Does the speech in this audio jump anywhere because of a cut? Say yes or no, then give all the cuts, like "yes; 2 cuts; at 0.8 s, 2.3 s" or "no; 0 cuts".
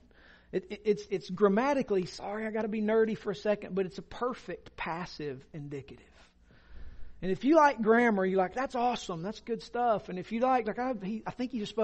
no; 0 cuts